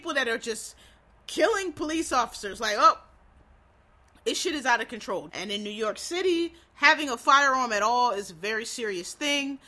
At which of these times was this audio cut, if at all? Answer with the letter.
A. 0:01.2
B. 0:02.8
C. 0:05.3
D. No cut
C